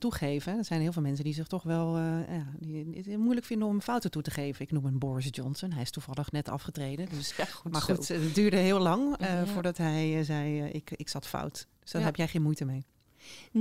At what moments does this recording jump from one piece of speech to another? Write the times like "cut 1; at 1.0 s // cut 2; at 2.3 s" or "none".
cut 1; at 7.3 s